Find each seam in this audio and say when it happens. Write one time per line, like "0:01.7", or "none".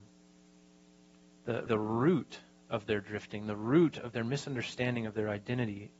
0:01.7